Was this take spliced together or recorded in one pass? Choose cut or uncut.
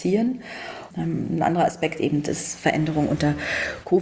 cut